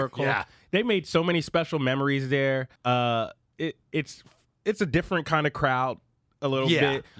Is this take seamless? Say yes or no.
no